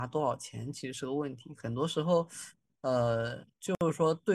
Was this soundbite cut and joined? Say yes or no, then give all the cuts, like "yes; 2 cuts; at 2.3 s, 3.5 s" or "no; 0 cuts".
no; 0 cuts